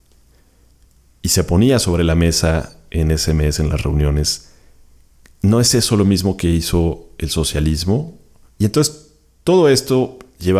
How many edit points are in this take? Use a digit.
1